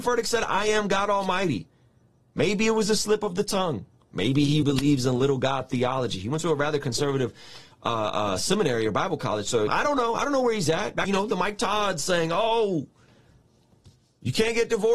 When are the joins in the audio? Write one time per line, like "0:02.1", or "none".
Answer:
0:04.6
0:09.7

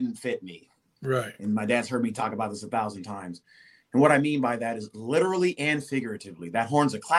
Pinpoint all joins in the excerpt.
none

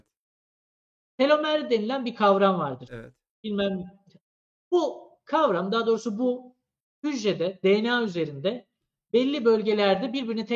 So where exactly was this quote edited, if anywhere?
0:02.9

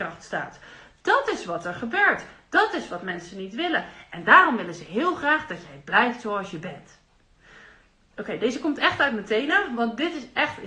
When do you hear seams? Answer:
none

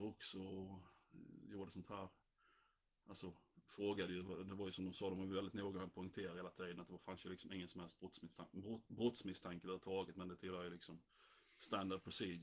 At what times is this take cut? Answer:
none

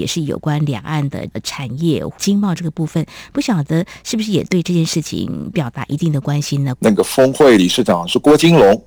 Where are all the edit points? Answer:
0:06.8

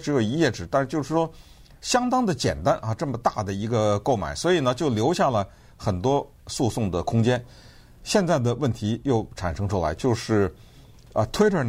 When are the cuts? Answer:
none

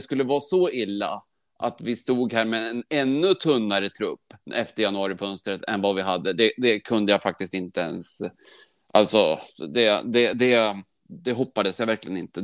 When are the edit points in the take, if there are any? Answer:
none

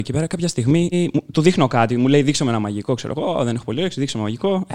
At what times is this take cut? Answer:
0:00.9

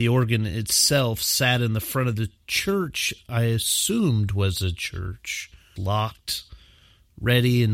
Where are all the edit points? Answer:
0:05.8

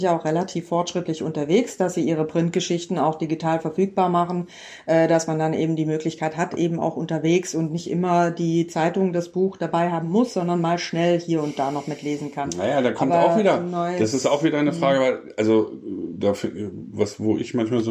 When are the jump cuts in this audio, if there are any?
none

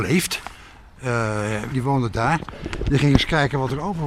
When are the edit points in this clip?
0:01.7

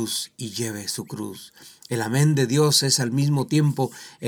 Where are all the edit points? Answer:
none

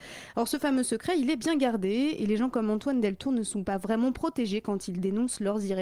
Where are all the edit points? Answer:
none

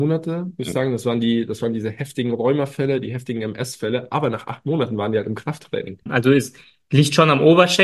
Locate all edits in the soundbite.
0:06.1

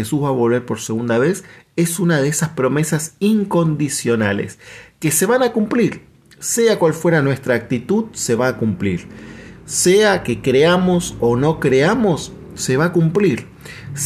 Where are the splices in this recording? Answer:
none

